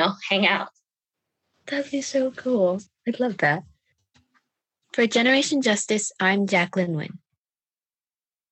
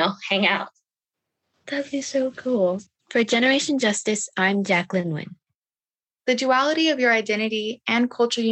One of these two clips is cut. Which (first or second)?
second